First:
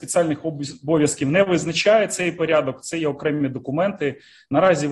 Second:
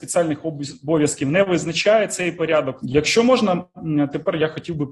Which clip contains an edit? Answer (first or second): second